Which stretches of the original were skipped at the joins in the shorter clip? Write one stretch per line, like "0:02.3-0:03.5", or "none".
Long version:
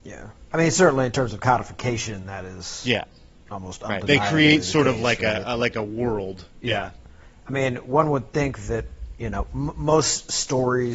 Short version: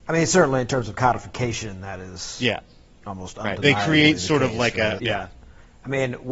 0:05.4-0:06.6